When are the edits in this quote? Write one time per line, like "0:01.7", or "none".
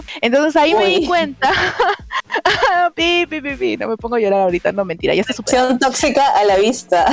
none

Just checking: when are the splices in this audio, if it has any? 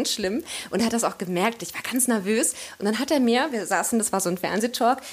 none

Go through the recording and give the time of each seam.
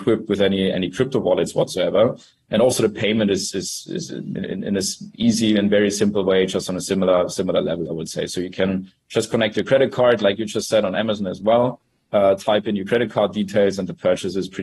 none

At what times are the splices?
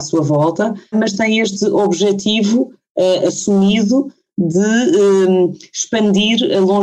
0:00.9

